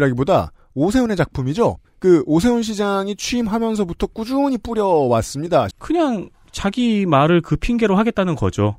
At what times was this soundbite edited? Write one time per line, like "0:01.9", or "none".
0:05.7

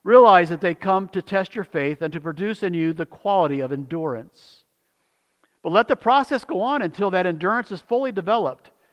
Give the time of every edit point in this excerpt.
none

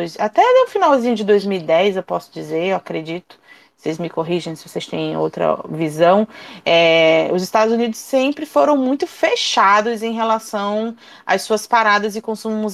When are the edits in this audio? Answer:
none

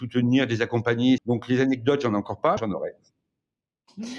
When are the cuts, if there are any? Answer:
0:01.2
0:02.6

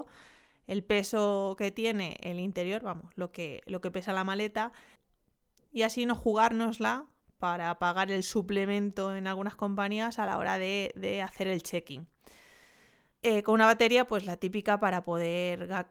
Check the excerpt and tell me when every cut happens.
0:13.1

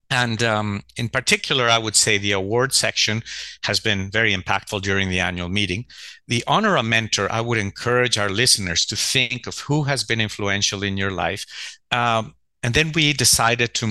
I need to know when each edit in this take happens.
0:11.8

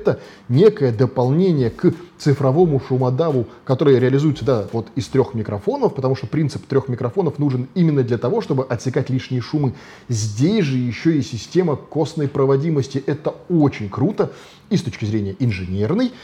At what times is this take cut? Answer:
none

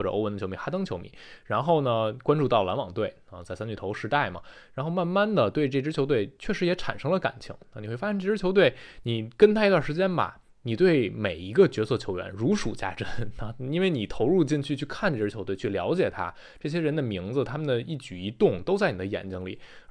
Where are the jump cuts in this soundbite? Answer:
none

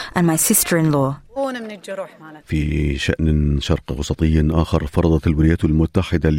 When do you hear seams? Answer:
0:01.4
0:02.4

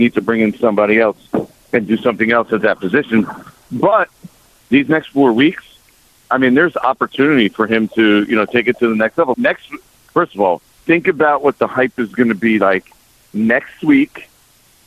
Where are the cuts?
0:06.7
0:09.3
0:10.7

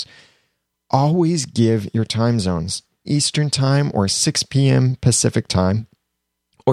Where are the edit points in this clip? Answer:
0:03.0

